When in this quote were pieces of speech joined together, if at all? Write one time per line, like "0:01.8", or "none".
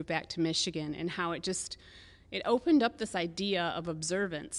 none